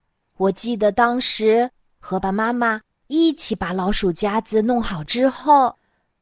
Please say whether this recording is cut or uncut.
cut